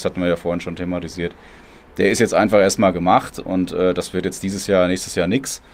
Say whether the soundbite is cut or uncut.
uncut